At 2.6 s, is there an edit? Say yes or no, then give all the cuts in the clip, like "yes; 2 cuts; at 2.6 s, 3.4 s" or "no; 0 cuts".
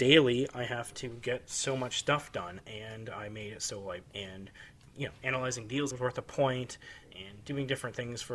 no; 2 cuts; at 4.1 s, 5.9 s